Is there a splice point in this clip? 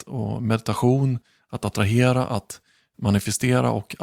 no; 0 cuts

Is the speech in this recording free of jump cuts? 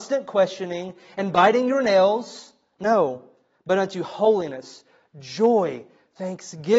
yes; 0 cuts

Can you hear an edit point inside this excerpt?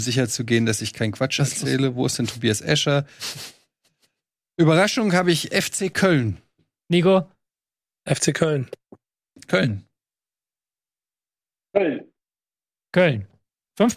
no; 0 cuts

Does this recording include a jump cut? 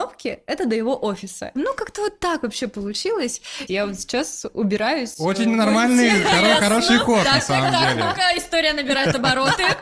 yes; 2 cuts; at 1.6 s, 3.7 s

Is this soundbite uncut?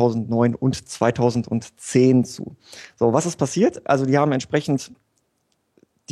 yes; 0 cuts

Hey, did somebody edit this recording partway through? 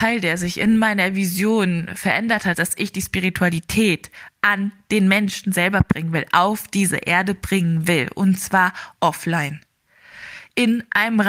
yes; 1 cut; at 2.5 s

